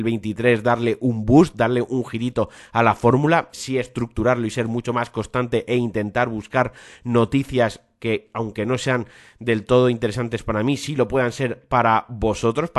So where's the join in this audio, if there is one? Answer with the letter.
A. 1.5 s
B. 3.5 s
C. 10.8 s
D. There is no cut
B